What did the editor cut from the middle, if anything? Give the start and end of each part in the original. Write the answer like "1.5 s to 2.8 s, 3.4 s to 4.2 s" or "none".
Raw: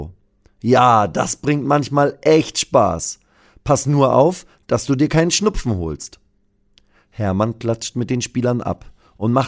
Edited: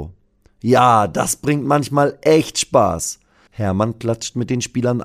3.5 s to 7.1 s